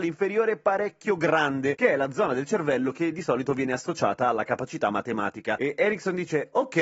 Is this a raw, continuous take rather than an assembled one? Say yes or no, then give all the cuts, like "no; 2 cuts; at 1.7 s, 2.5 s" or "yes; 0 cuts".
yes; 0 cuts